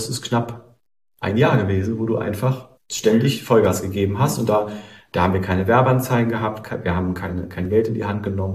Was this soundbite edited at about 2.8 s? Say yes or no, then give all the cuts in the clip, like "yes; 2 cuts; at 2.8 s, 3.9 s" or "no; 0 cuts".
yes; 1 cut; at 2.8 s